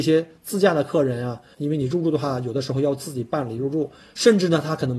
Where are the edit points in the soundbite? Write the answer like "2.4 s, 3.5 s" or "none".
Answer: 1.5 s